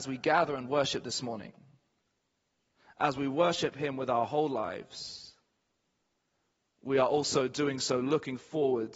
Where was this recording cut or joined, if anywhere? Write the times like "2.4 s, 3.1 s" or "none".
none